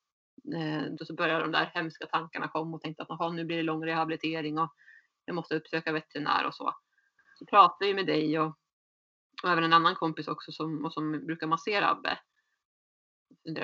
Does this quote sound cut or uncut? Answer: cut